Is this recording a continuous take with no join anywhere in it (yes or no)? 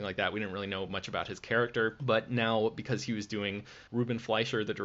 no